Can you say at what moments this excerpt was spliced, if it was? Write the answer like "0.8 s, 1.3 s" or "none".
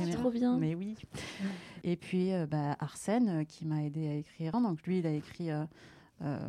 1.8 s, 4.5 s